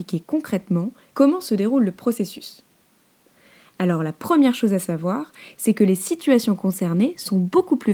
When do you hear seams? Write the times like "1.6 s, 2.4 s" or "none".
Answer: 1.1 s